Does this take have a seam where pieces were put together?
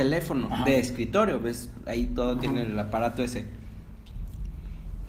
no; 0 cuts

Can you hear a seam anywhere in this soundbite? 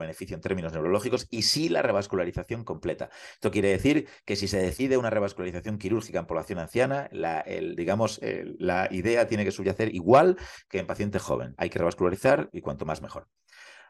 no; 0 cuts

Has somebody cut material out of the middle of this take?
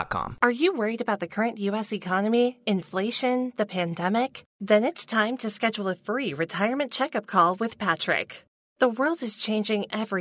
no; 0 cuts

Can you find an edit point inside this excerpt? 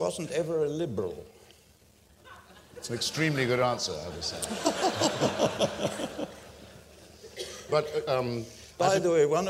no; 0 cuts

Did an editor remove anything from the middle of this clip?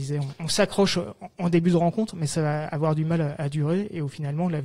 no; 0 cuts

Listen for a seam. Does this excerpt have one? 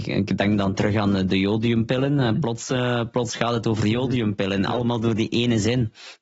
no; 0 cuts

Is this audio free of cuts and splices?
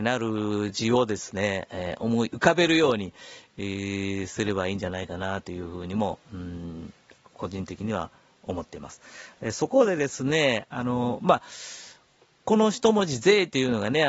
yes; 0 cuts

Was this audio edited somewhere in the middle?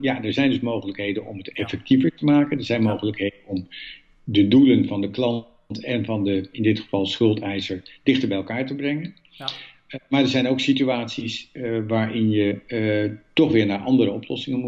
no; 0 cuts

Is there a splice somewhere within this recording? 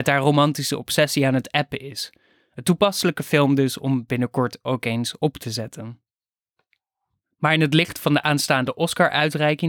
no; 0 cuts

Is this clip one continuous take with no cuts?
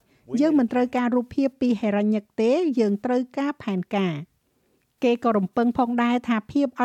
yes; 0 cuts

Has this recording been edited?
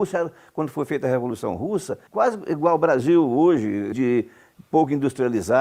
yes; 2 cuts; at 2.1 s, 3.9 s

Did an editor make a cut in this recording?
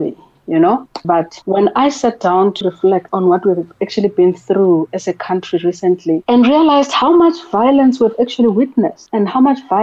yes; 2 cuts; at 1.0 s, 2.6 s

